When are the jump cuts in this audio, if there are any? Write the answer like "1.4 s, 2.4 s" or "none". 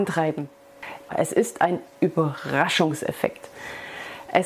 1.1 s

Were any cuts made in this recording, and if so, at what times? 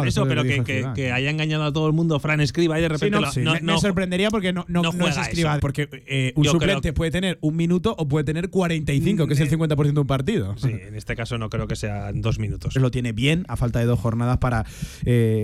3.2 s, 5.6 s, 12.8 s

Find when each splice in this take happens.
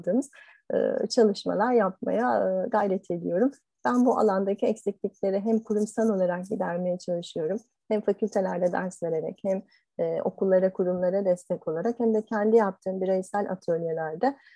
3.8 s

